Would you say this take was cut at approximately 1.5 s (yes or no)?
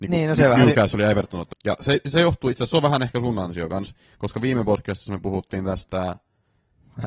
yes